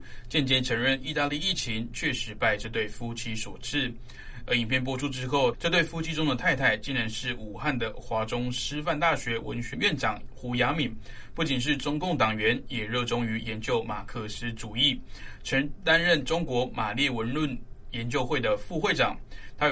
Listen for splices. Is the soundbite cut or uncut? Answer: cut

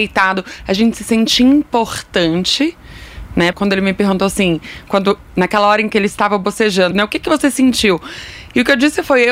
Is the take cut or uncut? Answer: cut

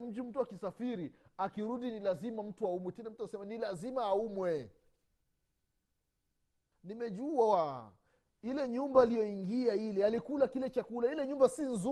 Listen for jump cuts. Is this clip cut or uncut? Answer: cut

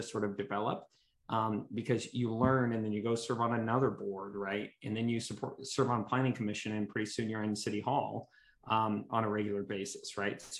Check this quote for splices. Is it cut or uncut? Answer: uncut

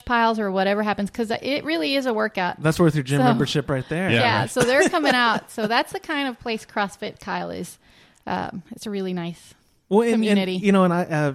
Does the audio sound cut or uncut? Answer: uncut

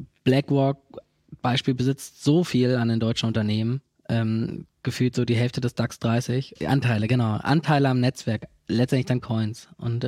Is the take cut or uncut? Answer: cut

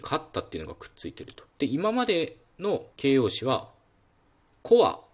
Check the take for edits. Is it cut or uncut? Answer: cut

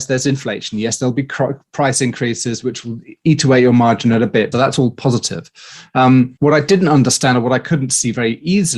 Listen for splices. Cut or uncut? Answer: cut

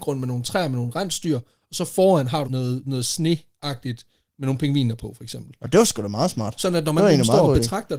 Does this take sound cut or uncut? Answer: cut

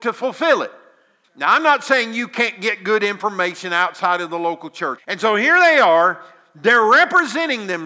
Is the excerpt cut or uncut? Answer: cut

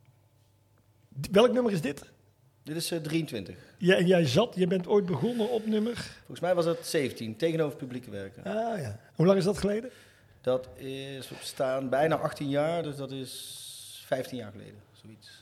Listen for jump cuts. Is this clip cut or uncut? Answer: uncut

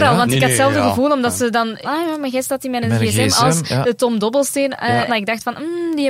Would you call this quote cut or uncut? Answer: cut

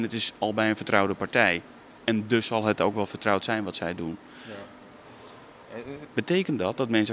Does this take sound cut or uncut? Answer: cut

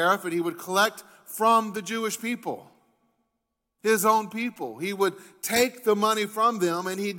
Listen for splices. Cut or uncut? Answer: uncut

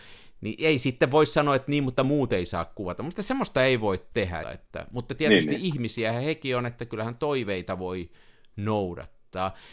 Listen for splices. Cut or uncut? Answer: cut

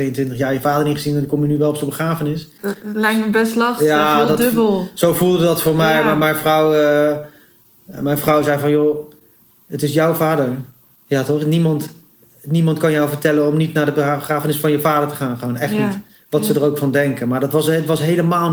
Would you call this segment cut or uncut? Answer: uncut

